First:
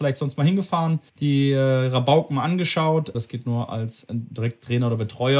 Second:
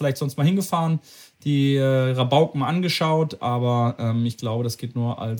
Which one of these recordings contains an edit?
first; 2 cuts; at 1.1 s, 3.1 s

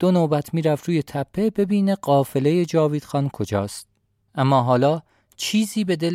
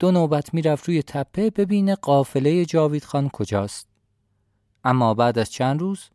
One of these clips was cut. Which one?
first; 1 cut; at 4.2 s

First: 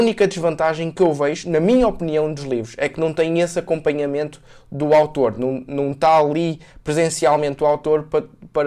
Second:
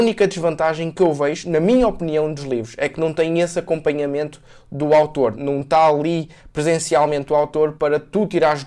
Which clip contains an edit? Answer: second; 2 cuts; at 5.3 s, 7.8 s

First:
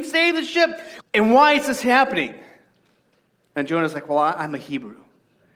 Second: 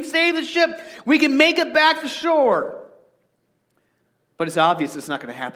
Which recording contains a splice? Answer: first; 1 cut; at 1.0 s

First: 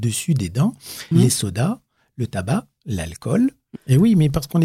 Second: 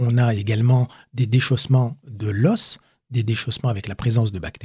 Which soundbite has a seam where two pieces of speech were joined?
first; 2 cuts; at 1.1 s, 3.8 s

